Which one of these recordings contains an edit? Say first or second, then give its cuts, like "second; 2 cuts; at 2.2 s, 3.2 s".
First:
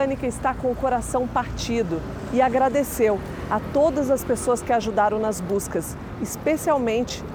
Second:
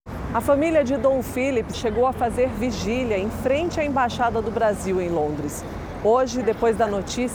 second; 1 cut; at 1.7 s